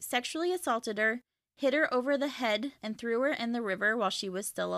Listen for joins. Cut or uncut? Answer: cut